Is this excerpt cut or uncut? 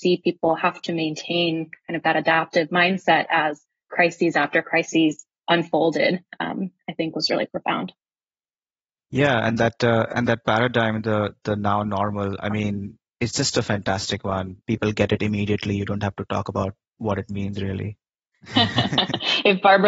cut